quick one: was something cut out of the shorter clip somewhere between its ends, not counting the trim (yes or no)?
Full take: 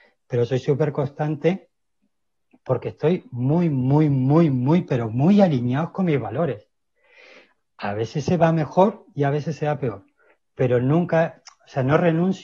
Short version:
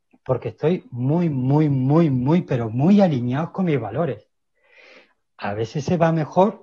no